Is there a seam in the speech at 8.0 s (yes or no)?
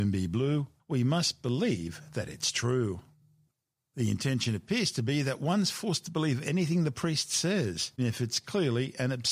yes